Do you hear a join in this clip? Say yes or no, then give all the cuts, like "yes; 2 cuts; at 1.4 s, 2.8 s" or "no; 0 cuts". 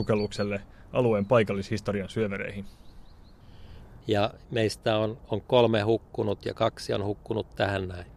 yes; 1 cut; at 4.0 s